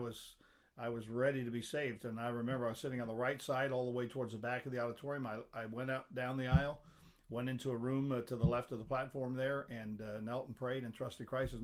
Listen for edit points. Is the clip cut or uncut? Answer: uncut